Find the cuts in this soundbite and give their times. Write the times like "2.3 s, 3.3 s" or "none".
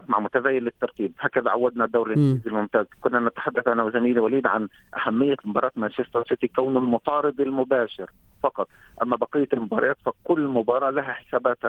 2.9 s